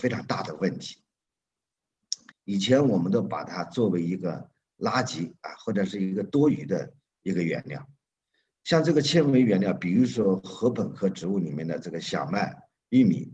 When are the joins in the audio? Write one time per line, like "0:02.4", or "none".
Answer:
0:02.3